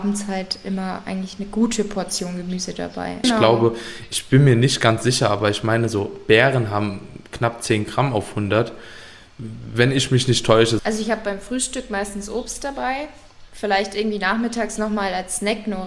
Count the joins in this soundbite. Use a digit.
2